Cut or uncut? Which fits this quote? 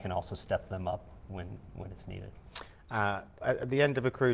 cut